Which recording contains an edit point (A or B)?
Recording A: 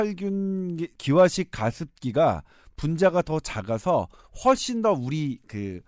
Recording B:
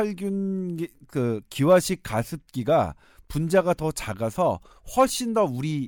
A